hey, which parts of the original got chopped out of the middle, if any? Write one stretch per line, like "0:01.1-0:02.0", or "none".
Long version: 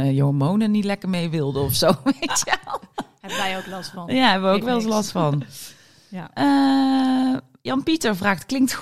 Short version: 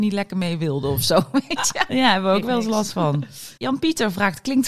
0:02.6-0:04.1
0:05.7-0:07.6